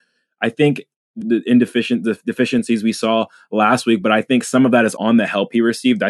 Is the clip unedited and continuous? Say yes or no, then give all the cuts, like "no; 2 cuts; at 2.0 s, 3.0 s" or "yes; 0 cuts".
no; 2 cuts; at 1.2 s, 5.0 s